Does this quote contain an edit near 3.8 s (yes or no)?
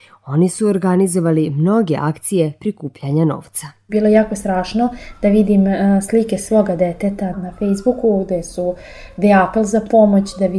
no